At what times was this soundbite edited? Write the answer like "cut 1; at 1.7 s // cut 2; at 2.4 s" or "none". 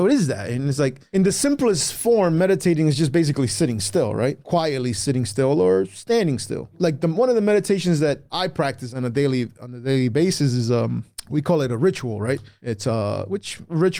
cut 1; at 6.7 s